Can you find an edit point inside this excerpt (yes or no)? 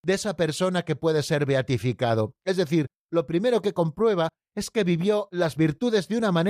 no